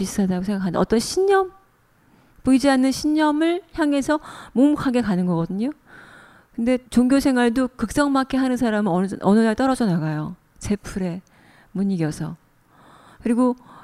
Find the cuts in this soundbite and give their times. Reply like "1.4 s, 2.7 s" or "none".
6.9 s